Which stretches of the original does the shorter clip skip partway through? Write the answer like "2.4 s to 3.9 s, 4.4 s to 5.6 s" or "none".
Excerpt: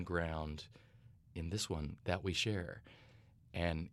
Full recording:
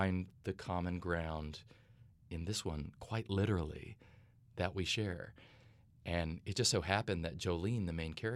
2.9 s to 4.5 s